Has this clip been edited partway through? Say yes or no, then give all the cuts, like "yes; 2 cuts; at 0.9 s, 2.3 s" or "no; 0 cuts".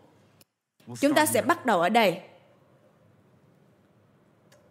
no; 0 cuts